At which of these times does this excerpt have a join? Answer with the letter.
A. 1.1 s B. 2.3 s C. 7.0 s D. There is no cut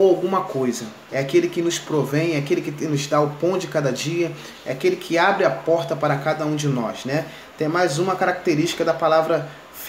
A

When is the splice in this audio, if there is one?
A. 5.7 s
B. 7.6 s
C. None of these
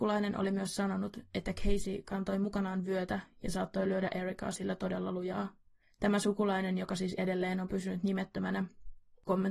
C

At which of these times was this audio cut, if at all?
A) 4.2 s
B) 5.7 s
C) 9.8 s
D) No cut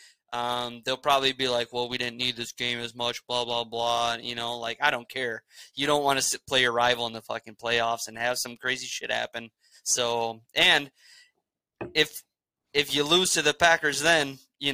D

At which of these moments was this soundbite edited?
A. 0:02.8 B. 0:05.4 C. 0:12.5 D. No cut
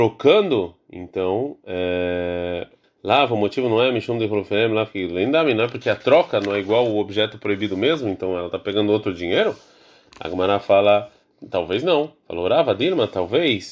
A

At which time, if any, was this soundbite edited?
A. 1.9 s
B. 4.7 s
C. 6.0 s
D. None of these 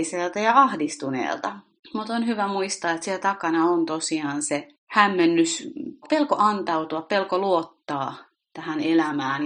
C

